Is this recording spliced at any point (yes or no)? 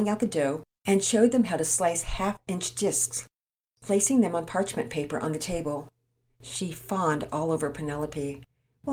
yes